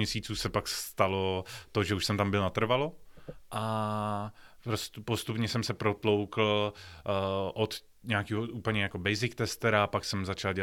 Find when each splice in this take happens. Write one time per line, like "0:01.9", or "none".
none